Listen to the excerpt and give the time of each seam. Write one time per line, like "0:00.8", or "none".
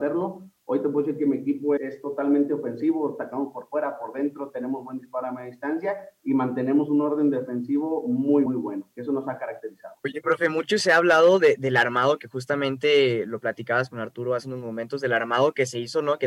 0:01.8
0:08.5
0:10.0